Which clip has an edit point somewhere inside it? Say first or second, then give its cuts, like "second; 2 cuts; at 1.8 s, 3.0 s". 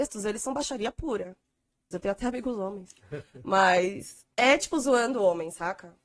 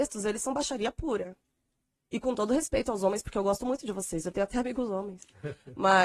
first; 2 cuts; at 1.9 s, 4.3 s